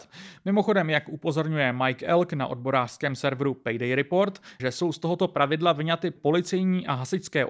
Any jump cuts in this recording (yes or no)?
yes